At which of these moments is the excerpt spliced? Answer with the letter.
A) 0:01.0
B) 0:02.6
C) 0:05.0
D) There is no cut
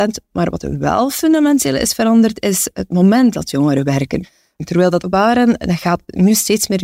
C